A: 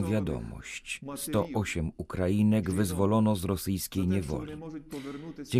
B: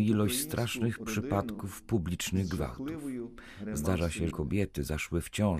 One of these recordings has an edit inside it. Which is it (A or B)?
B